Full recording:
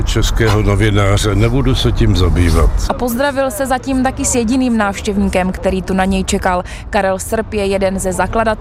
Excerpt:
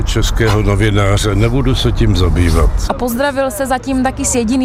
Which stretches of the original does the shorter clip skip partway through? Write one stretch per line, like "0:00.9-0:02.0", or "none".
none